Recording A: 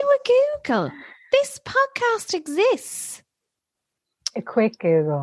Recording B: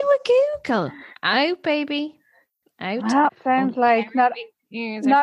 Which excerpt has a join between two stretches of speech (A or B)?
B